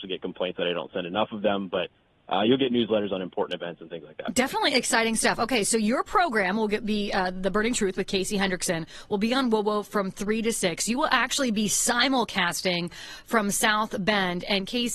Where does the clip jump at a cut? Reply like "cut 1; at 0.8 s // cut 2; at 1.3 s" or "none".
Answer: none